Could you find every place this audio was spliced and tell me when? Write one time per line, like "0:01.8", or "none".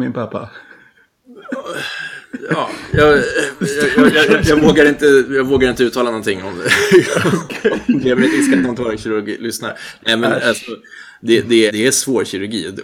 0:11.7